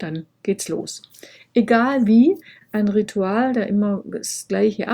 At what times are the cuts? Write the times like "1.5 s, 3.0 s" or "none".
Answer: 2.6 s